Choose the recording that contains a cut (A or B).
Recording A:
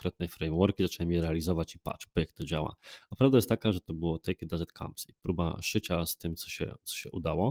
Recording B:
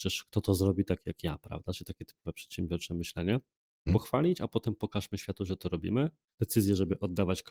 B